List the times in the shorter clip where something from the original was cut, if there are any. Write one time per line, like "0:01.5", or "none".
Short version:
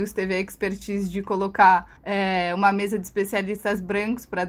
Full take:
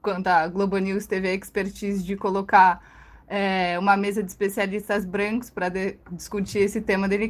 0:02.0